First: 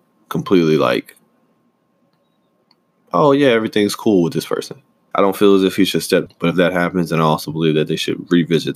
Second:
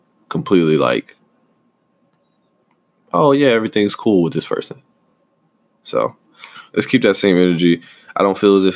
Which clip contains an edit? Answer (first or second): first